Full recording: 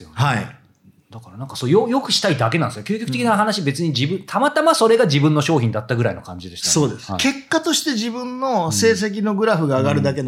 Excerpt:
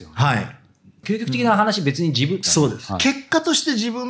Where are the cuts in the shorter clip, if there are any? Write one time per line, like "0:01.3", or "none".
0:01.0
0:02.4